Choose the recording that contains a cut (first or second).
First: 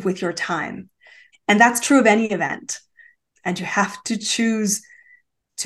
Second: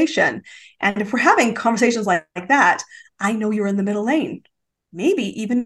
first